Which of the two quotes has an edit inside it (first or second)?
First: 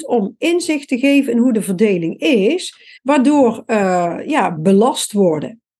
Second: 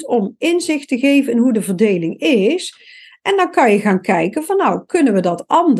first